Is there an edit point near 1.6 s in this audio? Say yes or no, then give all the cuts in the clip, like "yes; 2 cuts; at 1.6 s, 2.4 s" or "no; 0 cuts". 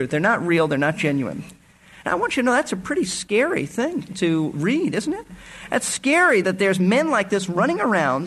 no; 2 cuts; at 4.1 s, 6.4 s